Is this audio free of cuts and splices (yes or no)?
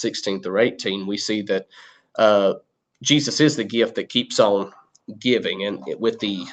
yes